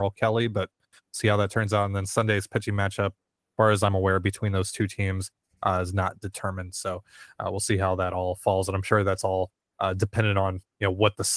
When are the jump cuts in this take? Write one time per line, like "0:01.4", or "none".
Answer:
none